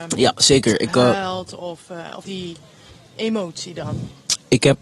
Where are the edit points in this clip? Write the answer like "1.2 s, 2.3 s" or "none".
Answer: 2.2 s